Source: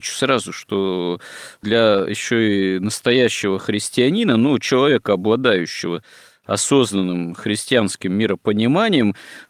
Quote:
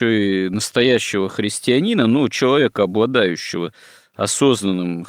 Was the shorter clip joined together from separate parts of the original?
no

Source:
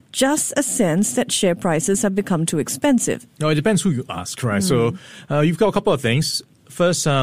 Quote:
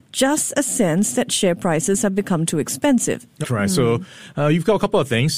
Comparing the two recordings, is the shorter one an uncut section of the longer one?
no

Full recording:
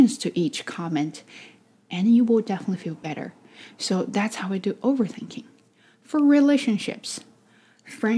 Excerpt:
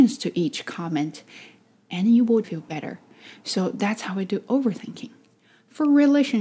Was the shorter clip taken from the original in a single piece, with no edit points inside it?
no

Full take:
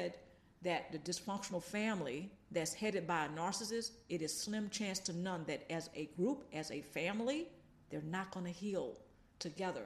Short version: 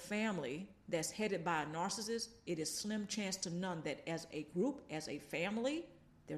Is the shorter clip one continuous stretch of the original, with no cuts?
yes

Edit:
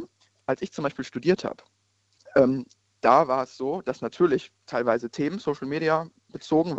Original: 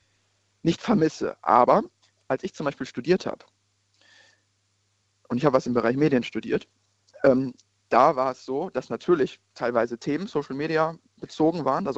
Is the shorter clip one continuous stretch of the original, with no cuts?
no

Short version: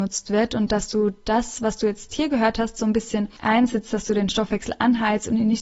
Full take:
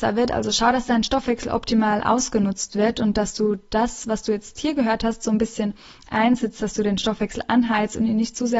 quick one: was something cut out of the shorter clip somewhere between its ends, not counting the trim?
yes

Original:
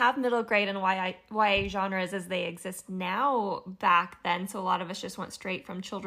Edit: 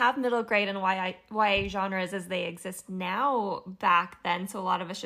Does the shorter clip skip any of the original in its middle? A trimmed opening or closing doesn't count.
no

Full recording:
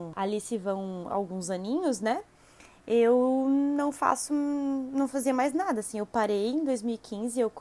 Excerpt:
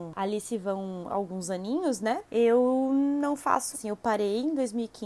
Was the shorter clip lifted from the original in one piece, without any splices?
no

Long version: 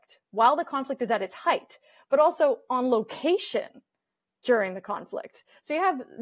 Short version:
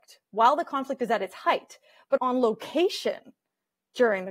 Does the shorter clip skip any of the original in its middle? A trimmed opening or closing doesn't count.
yes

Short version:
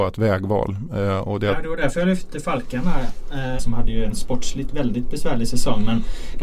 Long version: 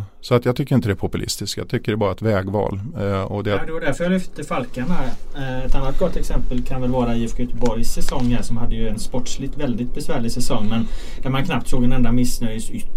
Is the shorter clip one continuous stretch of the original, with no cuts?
no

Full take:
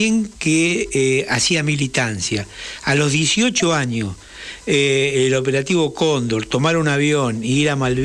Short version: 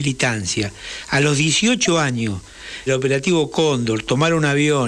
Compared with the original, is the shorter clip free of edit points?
no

